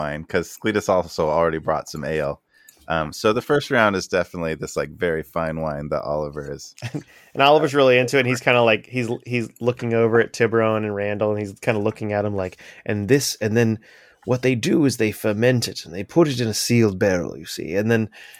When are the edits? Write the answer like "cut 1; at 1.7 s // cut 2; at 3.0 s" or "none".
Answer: none